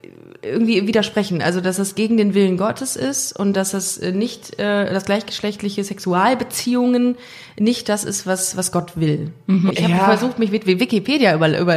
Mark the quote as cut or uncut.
cut